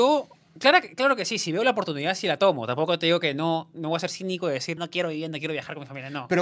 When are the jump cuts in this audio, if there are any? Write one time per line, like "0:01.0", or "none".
0:04.8